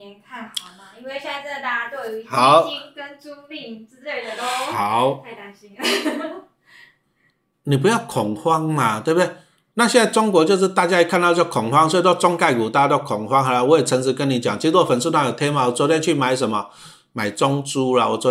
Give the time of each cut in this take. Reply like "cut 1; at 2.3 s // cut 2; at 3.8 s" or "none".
cut 1; at 9.7 s